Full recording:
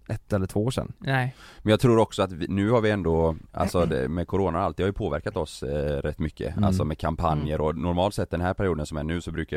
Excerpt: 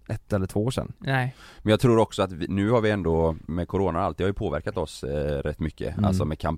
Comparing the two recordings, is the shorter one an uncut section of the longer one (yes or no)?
no